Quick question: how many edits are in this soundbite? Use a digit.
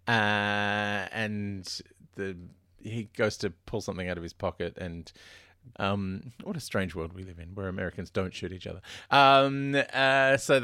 2